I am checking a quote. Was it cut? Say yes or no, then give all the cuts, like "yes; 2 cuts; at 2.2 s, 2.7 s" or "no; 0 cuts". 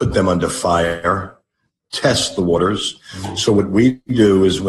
no; 0 cuts